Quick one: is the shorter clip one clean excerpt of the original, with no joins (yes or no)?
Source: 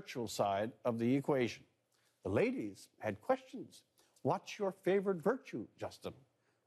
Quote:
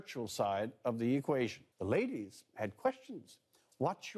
no